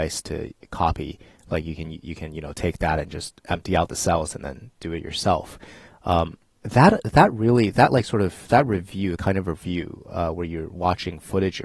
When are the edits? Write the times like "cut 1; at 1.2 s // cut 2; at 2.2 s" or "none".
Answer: none